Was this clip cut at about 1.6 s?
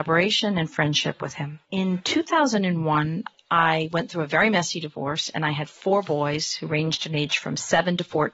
yes; 1 cut; at 1.6 s

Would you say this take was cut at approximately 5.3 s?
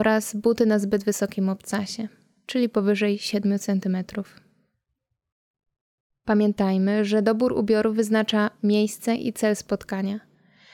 no; 0 cuts

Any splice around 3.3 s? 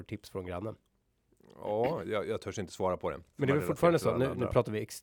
yes; 1 cut; at 3.3 s

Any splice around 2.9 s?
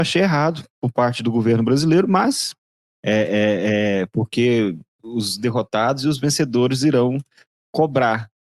yes; 1 cut; at 2.9 s

